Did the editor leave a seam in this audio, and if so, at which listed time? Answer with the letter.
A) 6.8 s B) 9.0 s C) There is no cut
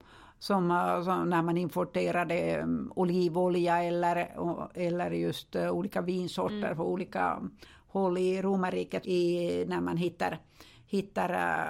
B